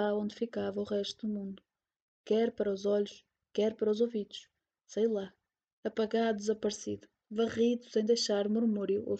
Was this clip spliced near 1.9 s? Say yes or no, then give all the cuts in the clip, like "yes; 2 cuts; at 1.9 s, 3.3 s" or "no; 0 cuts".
no; 0 cuts